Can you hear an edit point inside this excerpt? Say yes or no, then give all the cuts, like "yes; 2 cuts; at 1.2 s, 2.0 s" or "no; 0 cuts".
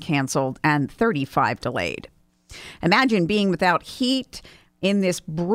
no; 0 cuts